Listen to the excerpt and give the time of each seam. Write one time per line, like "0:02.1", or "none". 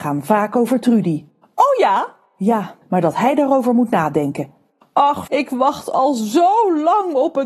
0:02.8
0:05.3